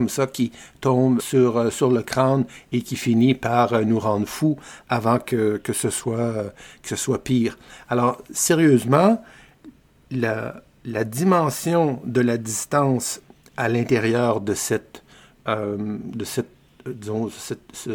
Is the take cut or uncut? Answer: cut